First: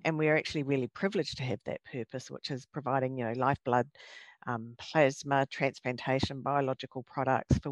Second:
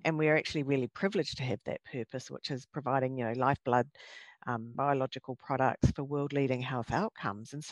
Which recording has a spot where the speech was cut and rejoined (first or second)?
second